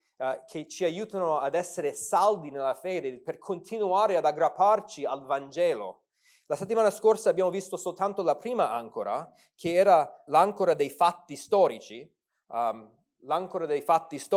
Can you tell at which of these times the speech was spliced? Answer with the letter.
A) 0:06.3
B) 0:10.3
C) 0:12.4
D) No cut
B